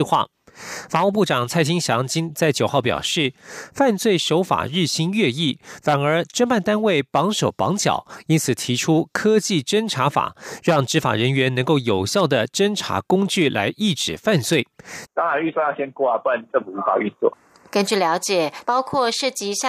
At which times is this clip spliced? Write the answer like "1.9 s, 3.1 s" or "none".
15.1 s, 18.6 s